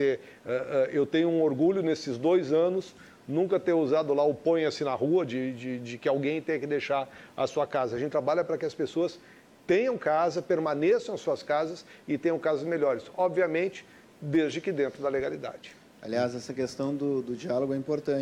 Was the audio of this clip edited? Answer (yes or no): no